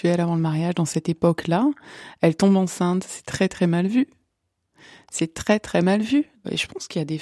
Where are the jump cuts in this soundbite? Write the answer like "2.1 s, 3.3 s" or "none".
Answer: none